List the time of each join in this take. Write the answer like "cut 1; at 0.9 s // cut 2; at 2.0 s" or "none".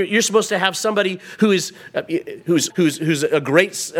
cut 1; at 2.7 s